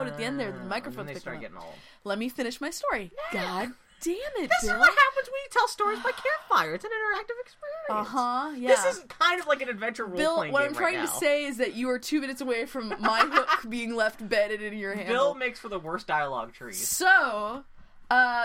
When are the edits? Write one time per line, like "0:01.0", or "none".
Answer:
none

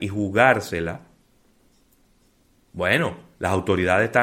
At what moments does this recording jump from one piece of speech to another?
none

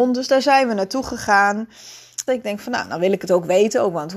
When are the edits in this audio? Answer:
0:02.3

